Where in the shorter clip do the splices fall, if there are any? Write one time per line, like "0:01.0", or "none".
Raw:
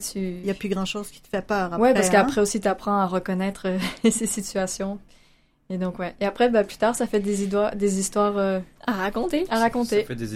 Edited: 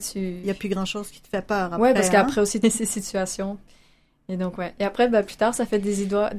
0:02.6